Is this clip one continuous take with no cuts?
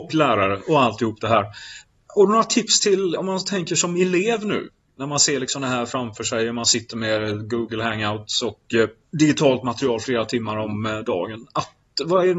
yes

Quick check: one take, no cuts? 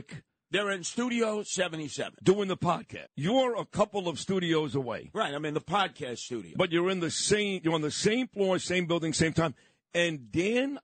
no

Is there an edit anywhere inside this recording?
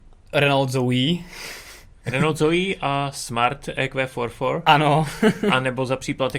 yes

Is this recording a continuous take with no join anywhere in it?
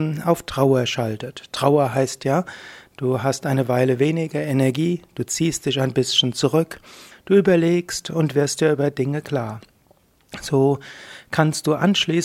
no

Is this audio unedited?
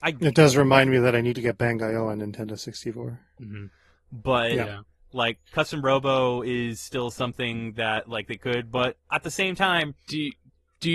no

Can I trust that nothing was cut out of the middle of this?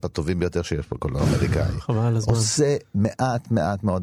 yes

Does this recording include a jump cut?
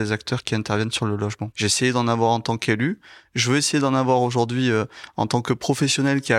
yes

